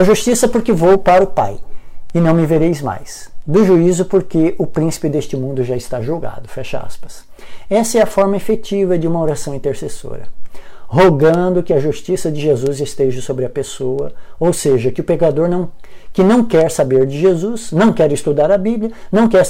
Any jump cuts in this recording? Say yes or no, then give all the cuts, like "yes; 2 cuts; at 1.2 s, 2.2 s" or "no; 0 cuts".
no; 0 cuts